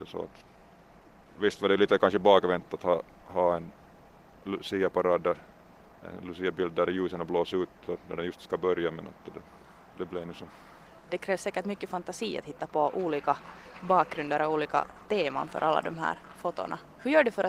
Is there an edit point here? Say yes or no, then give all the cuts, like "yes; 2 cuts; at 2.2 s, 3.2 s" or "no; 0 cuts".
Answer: no; 0 cuts